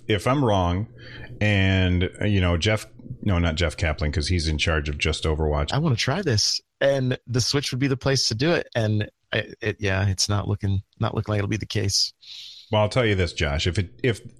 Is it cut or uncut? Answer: cut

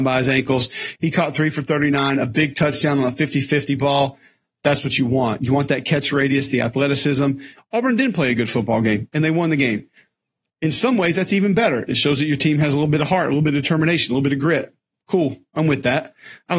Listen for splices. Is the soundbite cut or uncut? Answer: cut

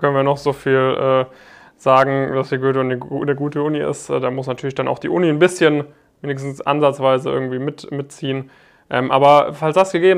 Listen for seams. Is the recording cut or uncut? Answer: uncut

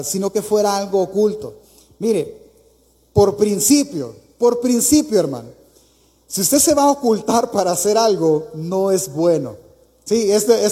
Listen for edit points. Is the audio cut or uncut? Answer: uncut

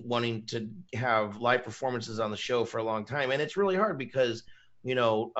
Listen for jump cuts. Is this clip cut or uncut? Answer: uncut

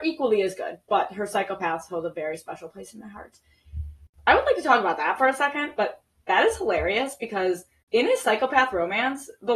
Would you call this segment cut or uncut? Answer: cut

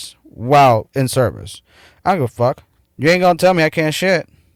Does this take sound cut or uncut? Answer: cut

